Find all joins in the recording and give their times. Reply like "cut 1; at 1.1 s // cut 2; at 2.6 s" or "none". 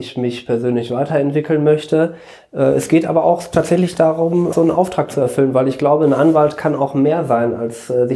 cut 1; at 4.5 s